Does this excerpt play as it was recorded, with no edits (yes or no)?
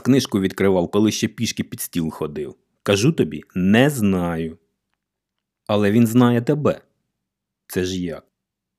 yes